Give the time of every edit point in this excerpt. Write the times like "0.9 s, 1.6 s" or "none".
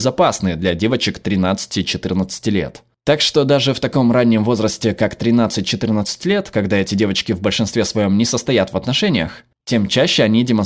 9.5 s